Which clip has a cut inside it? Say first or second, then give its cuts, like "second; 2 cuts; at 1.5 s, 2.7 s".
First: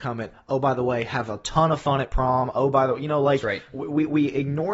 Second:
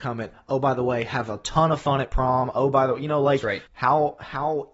second; 1 cut; at 3.7 s